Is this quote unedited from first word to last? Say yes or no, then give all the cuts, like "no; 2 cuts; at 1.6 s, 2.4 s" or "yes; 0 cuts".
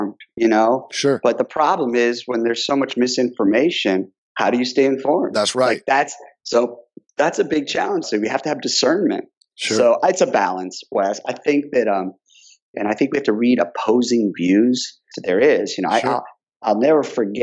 no; 3 cuts; at 8.0 s, 12.7 s, 15.1 s